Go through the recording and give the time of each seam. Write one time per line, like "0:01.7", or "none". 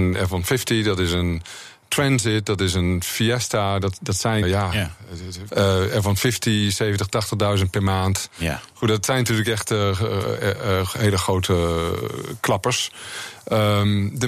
0:04.4
0:05.5